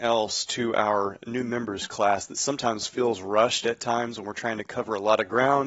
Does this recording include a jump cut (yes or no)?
no